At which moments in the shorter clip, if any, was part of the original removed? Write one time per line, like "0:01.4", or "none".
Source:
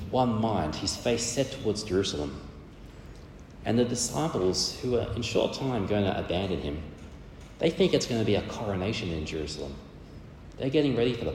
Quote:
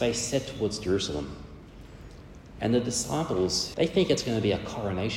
0:03.7